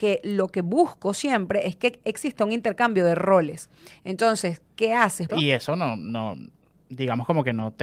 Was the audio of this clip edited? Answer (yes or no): yes